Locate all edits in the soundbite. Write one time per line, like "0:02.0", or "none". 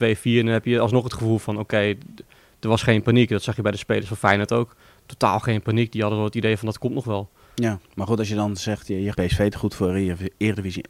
0:07.8
0:09.1